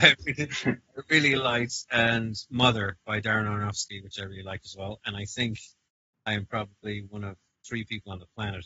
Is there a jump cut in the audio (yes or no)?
no